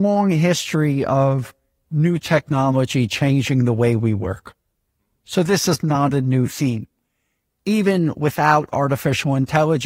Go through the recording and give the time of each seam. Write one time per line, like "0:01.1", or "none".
none